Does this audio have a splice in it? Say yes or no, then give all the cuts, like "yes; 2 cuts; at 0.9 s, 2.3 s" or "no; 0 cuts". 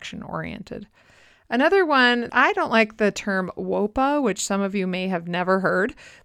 no; 0 cuts